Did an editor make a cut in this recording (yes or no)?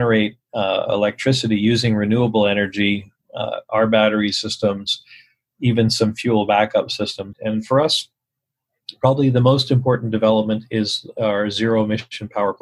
yes